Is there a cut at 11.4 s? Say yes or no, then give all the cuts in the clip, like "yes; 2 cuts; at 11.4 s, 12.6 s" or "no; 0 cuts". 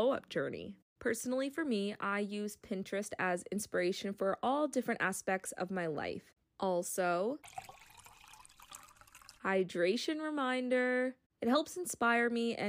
yes; 2 cuts; at 6.4 s, 11.4 s